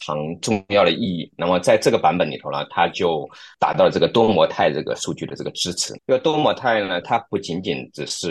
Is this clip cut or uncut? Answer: cut